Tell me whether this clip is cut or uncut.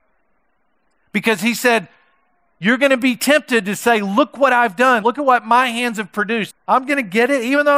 cut